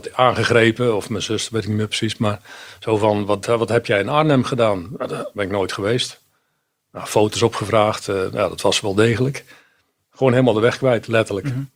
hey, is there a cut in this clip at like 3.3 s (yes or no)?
no